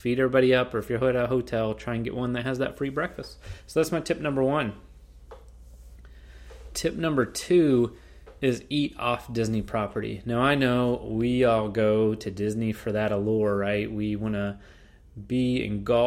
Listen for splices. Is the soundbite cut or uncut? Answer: uncut